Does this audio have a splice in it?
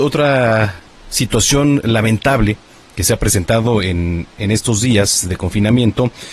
no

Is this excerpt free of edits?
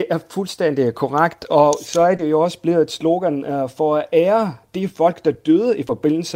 yes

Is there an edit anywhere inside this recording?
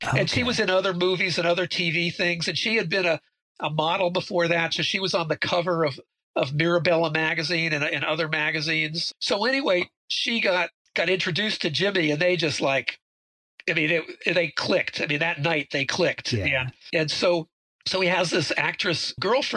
no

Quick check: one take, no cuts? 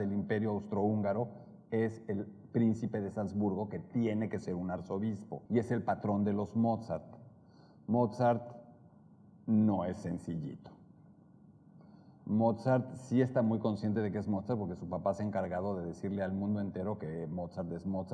no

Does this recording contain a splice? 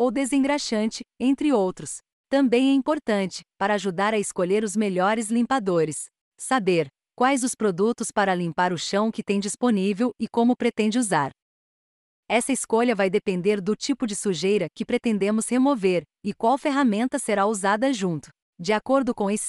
yes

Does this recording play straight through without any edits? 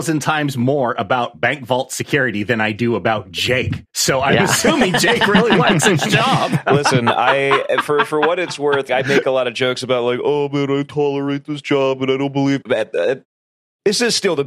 no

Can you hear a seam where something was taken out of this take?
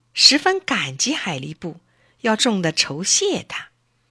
yes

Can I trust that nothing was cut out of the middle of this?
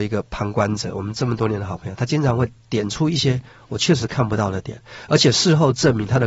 yes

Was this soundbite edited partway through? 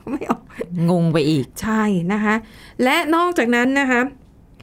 no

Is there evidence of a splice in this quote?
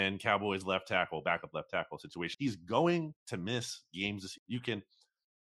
yes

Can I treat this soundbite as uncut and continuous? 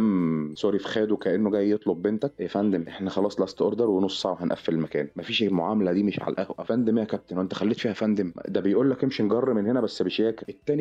no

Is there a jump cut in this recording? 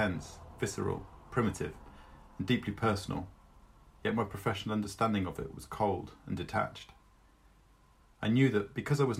no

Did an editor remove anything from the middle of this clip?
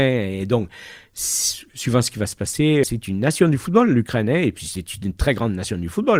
yes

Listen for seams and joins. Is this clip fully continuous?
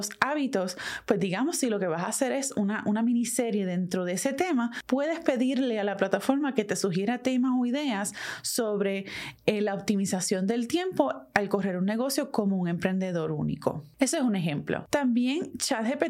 yes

